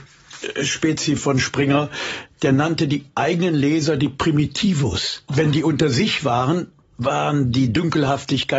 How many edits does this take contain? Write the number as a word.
one